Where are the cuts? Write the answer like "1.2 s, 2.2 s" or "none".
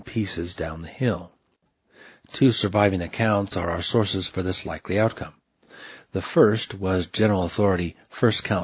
none